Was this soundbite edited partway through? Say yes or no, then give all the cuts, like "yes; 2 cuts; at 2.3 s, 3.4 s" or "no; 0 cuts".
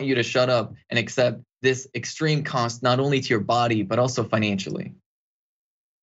no; 0 cuts